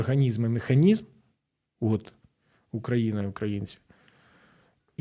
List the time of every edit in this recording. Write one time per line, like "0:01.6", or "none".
none